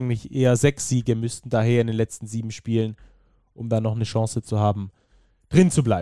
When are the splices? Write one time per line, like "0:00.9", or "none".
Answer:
none